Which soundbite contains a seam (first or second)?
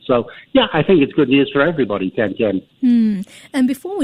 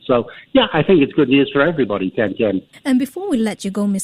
second